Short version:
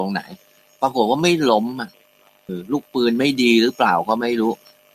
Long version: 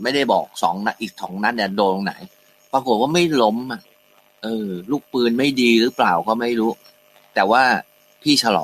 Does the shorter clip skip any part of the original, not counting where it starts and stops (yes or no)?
yes